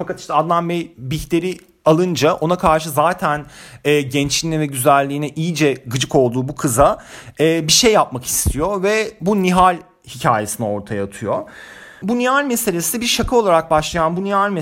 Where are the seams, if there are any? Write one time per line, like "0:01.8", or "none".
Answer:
none